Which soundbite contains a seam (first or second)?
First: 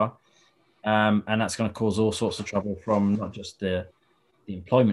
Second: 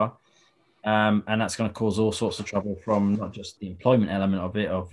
second